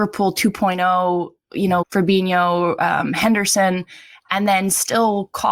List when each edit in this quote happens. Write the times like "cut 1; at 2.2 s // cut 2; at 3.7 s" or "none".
cut 1; at 1.8 s